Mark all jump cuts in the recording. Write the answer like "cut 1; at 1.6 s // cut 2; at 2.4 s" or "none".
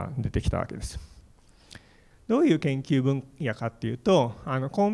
cut 1; at 2.1 s